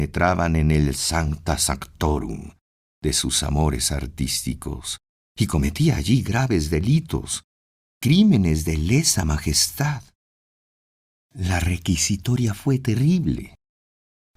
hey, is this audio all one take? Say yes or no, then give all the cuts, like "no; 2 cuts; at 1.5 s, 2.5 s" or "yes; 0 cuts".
yes; 0 cuts